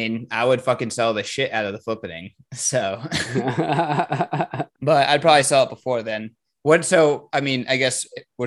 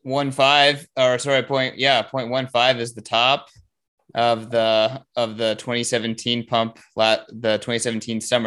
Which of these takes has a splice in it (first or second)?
first